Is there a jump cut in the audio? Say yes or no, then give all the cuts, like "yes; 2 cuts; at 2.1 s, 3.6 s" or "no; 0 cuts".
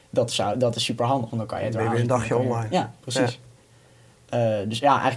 no; 0 cuts